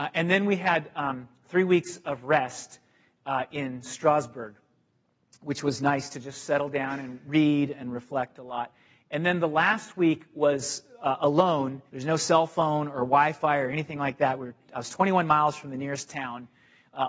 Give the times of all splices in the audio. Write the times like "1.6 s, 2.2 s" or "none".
11.9 s